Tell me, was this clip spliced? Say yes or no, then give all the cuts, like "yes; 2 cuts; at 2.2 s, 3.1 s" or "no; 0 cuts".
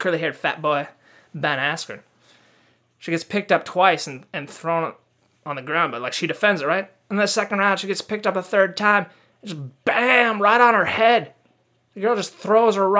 no; 0 cuts